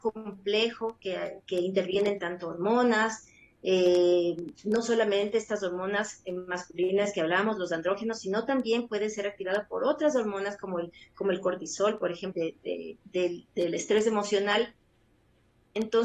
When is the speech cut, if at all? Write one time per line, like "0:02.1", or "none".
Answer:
0:12.3